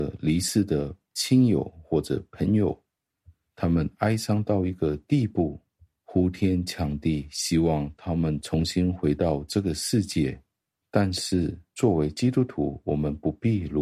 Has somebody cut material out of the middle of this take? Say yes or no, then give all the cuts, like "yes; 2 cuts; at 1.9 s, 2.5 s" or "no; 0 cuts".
no; 0 cuts